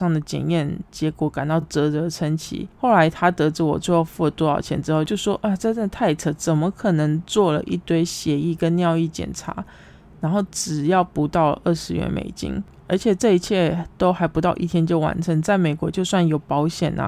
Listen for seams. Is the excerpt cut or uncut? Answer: uncut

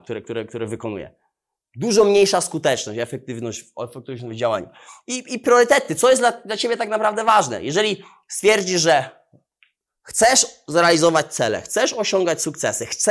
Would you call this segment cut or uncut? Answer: uncut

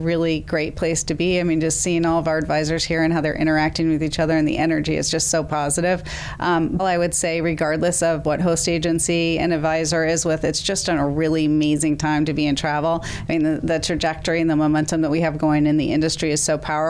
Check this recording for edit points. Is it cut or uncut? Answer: cut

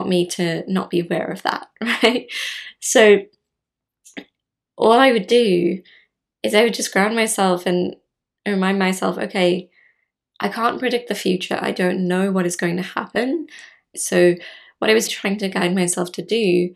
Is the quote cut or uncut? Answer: cut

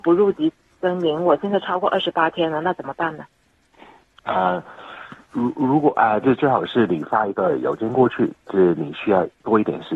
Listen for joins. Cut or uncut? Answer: cut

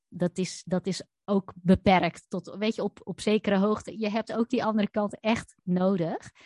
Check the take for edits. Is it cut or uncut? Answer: uncut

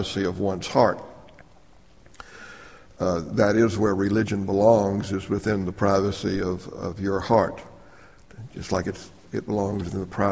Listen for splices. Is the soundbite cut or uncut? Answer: cut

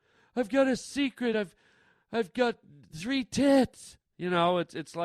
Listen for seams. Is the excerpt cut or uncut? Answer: uncut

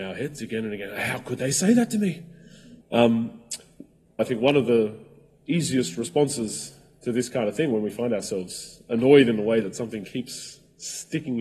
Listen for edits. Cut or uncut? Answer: cut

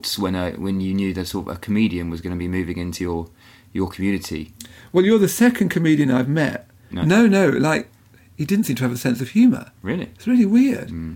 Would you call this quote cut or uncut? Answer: cut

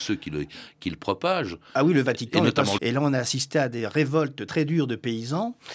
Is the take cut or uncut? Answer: cut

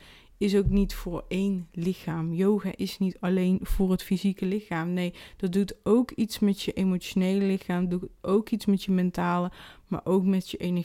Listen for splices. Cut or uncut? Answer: uncut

